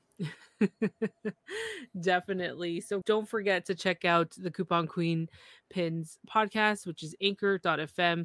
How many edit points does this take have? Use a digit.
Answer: 1